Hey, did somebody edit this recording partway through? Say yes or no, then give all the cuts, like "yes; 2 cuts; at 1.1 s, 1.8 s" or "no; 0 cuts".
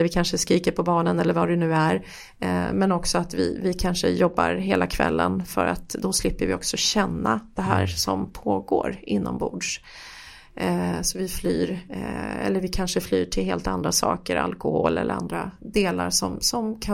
no; 0 cuts